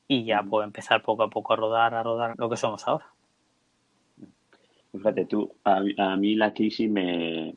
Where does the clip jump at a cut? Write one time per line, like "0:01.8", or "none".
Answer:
0:02.3